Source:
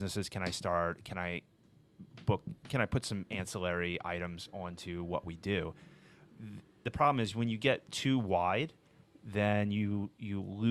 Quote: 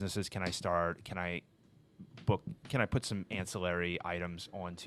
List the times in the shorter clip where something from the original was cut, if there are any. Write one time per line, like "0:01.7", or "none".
none

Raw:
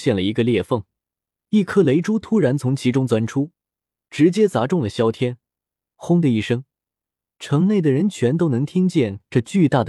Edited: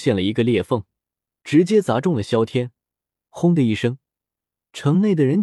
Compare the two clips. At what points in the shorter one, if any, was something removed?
0:01.3

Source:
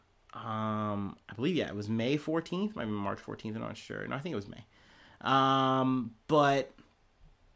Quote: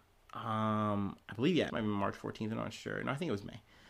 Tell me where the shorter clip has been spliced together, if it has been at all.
0:01.7

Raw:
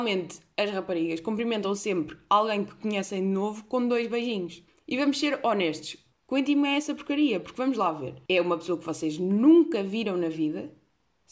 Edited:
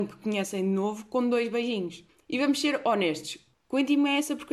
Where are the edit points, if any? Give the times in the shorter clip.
none

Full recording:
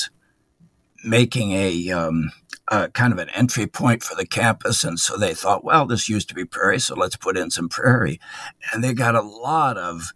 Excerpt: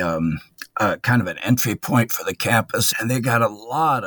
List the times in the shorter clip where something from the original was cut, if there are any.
0:02.9

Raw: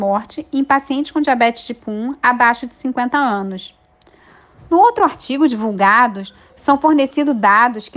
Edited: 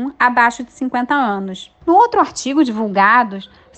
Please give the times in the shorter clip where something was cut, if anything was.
0:01.8

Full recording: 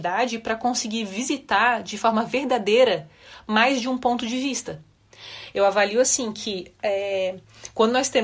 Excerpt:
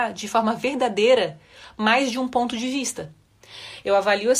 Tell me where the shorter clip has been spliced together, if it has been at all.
none

